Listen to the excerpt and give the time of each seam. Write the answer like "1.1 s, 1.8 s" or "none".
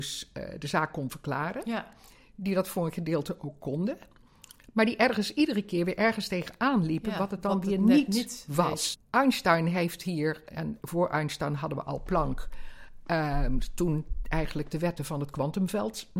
8.9 s